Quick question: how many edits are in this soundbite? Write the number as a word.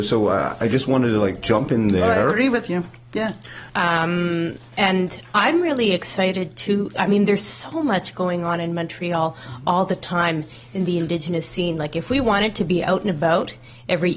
one